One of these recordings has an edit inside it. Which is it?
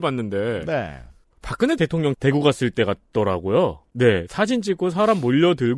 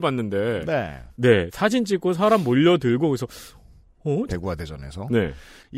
second; 2 cuts; at 1.1 s, 4.3 s

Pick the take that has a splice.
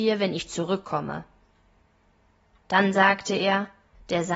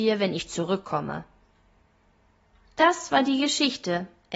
first; 1 cut; at 2.6 s

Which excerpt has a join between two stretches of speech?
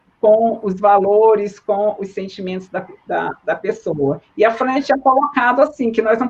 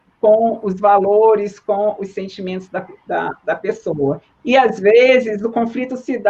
second; 1 cut; at 4.3 s

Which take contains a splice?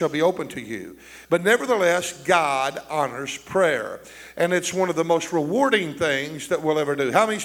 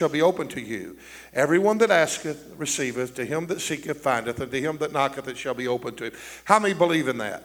first; 1 cut; at 1.3 s

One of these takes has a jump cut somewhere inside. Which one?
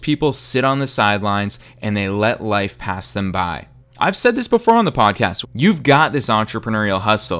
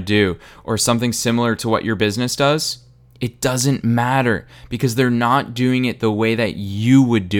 first; 2 cuts; at 3.8 s, 5.4 s

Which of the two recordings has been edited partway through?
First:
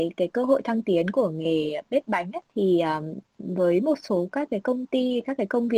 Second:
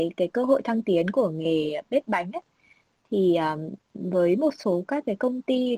first; 1 cut; at 2.5 s

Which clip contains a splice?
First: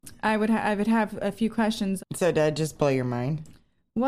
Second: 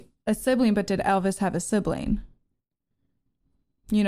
first; 1 cut; at 2.0 s

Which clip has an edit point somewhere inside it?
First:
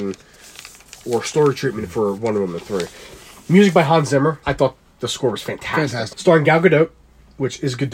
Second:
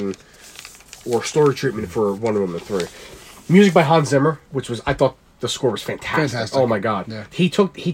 first; 2 cuts; at 4.4 s, 6.1 s

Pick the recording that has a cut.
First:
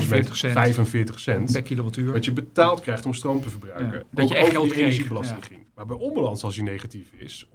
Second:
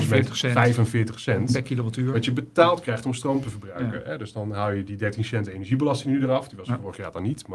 first; 2 cuts; at 4.0 s, 5.7 s

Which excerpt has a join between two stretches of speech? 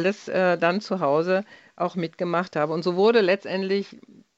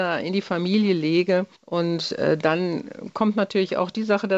second; 1 cut; at 1.5 s

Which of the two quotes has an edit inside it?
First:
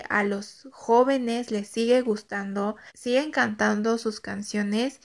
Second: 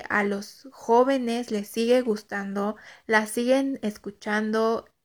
first; 1 cut; at 2.9 s

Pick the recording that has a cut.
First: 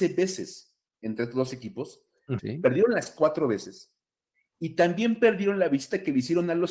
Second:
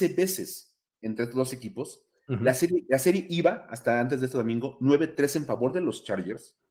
first; 1 cut; at 2.4 s

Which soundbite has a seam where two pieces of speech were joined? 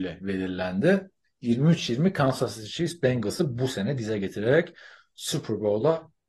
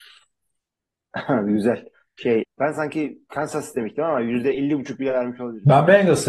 second; 2 cuts; at 2.4 s, 4.5 s

